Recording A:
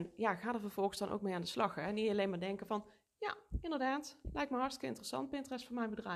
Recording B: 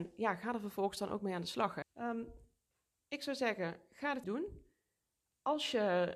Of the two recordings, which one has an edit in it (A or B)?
B